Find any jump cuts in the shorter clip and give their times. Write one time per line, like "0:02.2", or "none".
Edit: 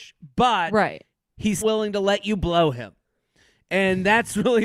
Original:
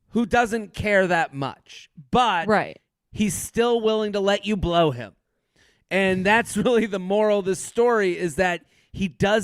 0:01.6